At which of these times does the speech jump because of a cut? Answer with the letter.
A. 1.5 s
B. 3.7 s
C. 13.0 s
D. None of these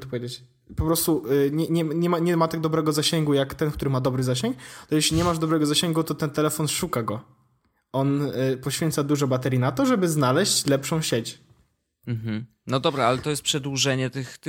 D